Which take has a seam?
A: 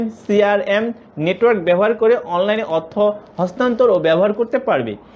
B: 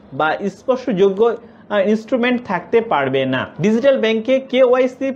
B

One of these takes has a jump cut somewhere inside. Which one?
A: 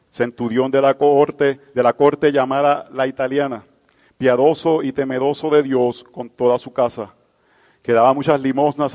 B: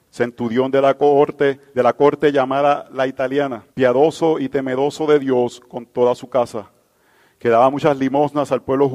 B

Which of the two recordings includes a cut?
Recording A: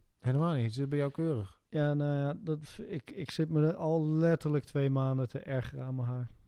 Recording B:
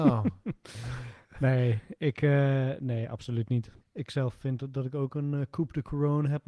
B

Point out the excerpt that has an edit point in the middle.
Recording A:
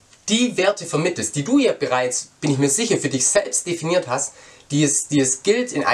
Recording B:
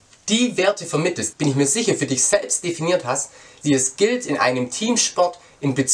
B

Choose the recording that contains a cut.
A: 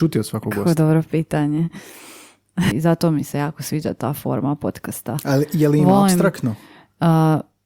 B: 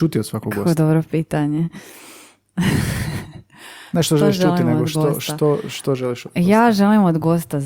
A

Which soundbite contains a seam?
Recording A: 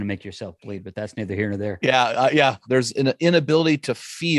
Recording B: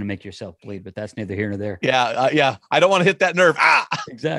A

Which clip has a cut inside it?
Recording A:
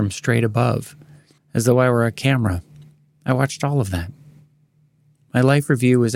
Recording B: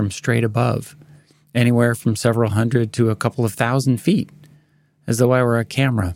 A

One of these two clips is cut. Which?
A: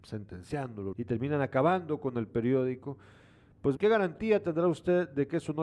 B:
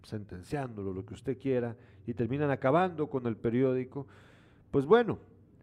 A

